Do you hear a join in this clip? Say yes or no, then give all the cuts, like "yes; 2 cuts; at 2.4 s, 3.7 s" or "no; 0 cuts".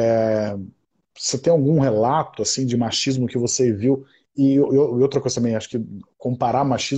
no; 0 cuts